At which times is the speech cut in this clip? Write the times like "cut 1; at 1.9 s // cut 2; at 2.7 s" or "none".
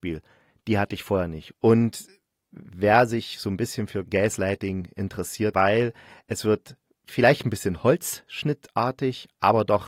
cut 1; at 1.5 s // cut 2; at 5.5 s